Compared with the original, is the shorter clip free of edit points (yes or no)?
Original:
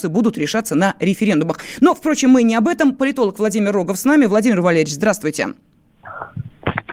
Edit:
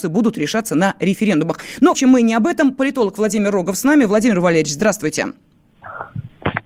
no